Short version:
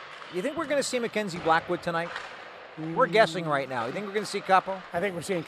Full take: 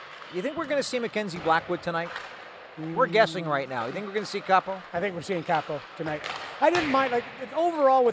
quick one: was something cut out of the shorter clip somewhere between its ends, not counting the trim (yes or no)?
no